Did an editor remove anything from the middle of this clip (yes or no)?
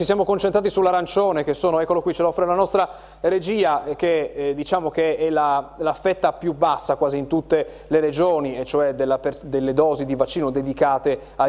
no